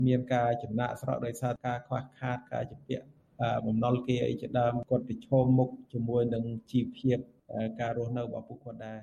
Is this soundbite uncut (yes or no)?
yes